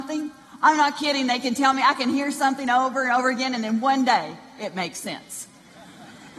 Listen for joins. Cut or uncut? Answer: uncut